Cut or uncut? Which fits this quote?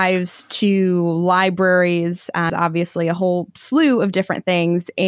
cut